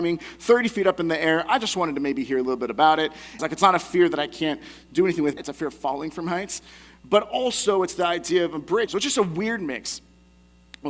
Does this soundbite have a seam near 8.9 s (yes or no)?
yes